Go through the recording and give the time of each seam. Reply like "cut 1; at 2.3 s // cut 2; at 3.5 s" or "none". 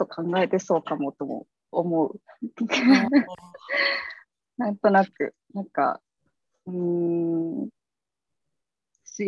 none